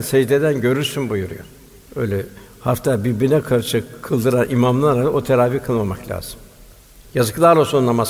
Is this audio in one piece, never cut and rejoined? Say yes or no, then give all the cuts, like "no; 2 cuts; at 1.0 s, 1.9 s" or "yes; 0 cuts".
no; 2 cuts; at 1.9 s, 7.0 s